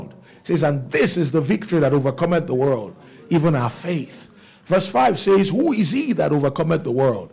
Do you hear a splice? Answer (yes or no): no